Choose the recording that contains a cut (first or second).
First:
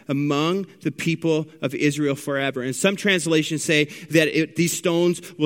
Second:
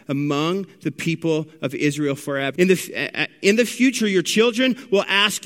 second